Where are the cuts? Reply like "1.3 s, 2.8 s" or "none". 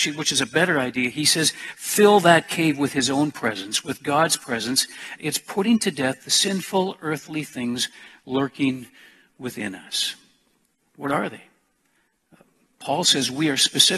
5.2 s, 10.8 s